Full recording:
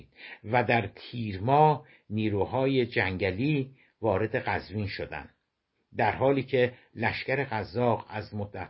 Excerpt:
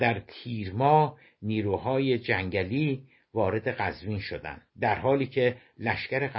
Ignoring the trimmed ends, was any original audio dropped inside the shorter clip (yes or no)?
yes